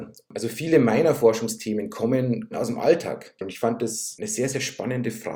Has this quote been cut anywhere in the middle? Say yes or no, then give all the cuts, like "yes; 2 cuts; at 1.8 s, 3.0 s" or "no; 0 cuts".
yes; 1 cut; at 3.4 s